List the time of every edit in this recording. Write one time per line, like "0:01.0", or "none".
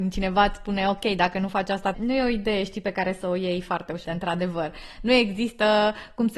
0:01.9
0:04.1